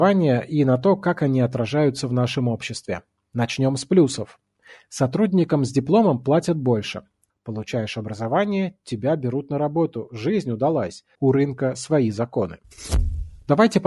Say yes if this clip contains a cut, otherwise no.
yes